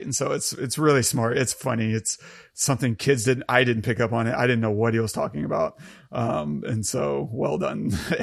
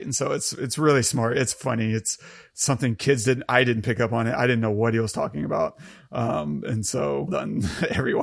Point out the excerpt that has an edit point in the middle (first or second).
second